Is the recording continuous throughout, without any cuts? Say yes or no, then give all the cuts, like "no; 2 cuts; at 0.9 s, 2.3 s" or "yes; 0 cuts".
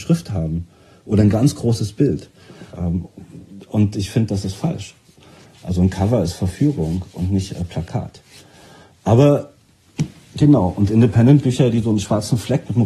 no; 1 cut; at 2.7 s